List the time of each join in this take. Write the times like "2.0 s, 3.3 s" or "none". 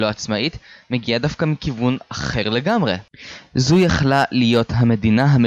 none